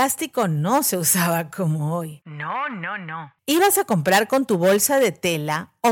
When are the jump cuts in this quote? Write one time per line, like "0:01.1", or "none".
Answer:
none